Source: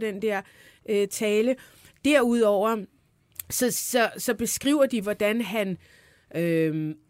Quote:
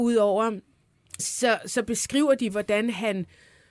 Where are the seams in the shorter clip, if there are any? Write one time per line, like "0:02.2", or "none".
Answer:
0:01.2